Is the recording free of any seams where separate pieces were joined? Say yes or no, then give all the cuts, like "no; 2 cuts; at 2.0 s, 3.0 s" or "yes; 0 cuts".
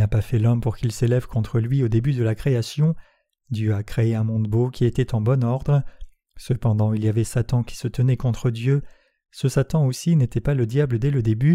yes; 0 cuts